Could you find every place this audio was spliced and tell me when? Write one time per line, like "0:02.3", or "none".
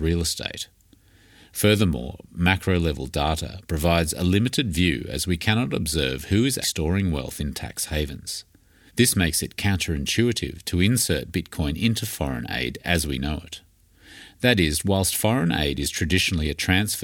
0:06.6
0:08.9